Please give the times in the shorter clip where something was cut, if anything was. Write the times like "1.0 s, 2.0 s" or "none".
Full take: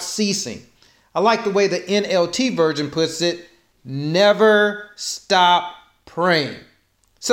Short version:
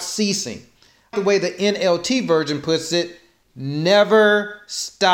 1.1 s